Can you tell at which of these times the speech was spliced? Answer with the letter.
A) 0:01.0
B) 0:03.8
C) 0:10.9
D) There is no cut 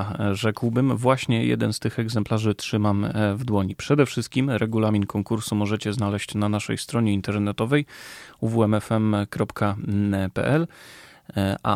D